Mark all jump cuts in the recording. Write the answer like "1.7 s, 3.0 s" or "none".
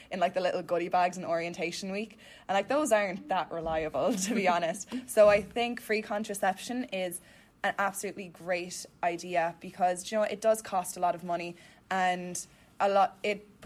none